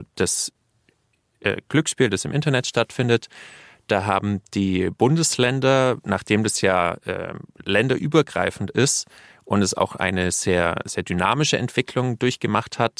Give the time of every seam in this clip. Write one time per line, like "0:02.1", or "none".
none